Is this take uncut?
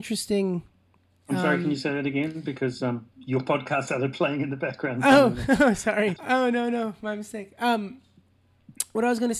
no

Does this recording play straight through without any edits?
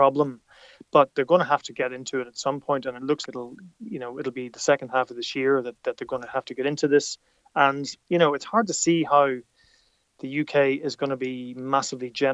no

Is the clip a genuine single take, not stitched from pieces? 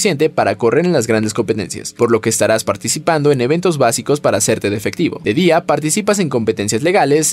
yes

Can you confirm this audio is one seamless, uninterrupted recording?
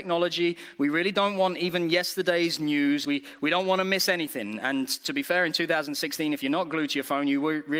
no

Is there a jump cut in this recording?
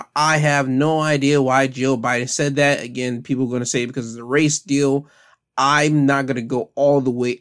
no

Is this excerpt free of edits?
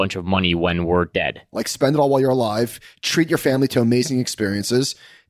no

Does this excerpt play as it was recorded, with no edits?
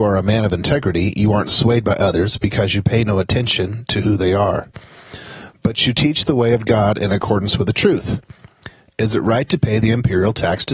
yes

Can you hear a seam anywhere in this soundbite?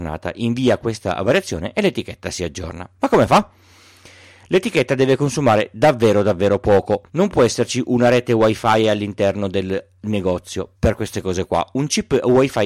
yes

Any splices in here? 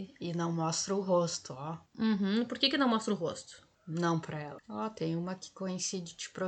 yes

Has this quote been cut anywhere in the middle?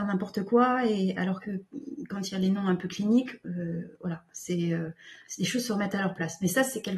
no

